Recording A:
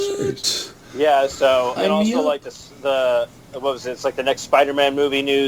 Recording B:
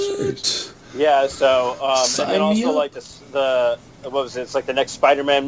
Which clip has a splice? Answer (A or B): A